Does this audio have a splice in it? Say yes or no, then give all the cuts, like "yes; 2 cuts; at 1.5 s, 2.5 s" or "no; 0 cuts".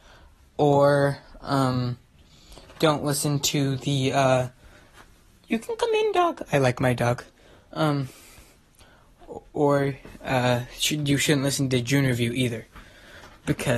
no; 0 cuts